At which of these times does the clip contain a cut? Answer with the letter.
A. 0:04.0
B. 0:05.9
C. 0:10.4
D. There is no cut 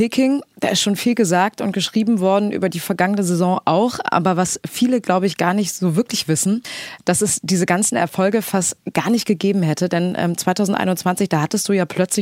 D